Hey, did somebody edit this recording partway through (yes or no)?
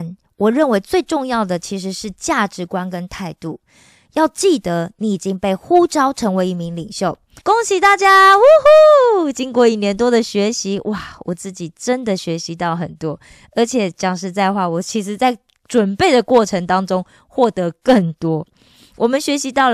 yes